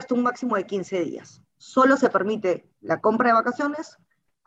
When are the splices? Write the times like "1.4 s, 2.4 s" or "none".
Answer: none